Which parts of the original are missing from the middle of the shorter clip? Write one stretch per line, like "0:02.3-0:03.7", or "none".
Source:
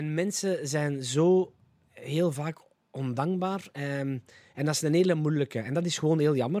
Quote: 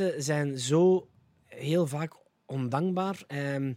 none